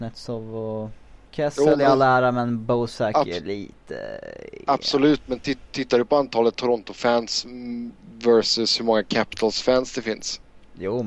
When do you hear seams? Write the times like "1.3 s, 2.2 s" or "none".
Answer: 1.3 s